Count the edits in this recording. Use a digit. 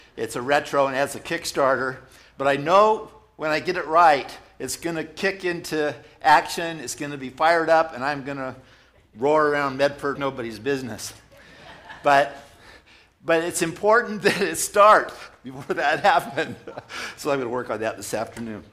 1